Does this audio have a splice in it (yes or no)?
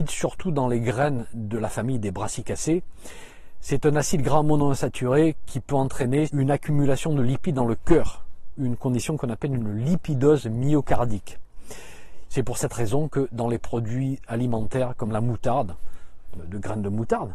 yes